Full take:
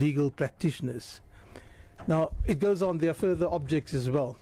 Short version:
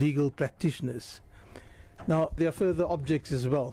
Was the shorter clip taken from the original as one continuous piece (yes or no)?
no